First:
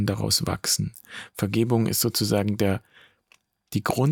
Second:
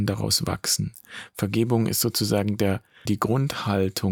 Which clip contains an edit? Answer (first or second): second